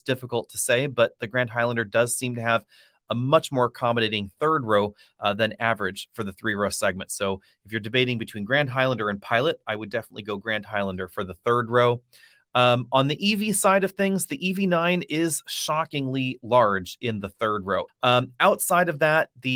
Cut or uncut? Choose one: cut